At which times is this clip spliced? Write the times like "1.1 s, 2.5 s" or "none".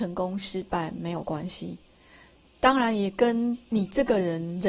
none